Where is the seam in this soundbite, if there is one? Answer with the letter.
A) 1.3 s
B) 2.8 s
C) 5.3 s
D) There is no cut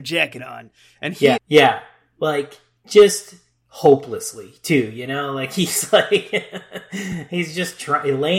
A